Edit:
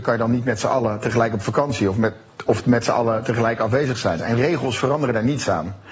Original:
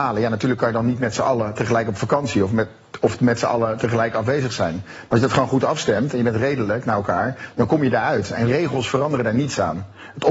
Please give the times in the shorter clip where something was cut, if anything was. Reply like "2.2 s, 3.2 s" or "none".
4.2 s